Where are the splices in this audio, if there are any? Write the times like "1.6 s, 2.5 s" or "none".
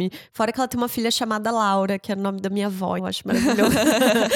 3.0 s